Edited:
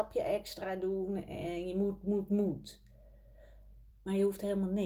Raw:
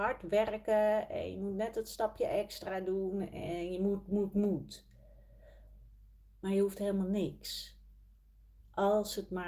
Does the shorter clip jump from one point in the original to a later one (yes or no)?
yes